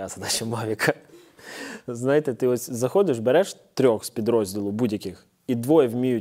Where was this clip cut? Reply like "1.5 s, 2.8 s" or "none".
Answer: none